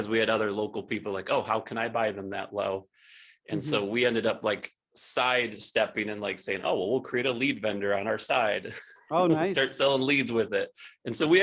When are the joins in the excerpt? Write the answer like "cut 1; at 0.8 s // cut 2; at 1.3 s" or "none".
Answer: none